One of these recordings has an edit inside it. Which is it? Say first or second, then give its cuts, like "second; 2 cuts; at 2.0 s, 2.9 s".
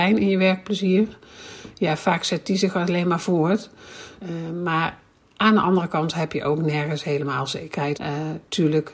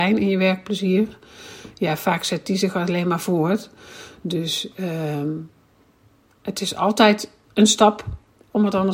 first; 2 cuts; at 4.2 s, 7.9 s